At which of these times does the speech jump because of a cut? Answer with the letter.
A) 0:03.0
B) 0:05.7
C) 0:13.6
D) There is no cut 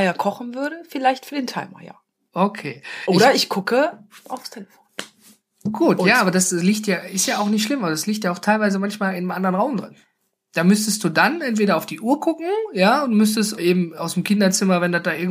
C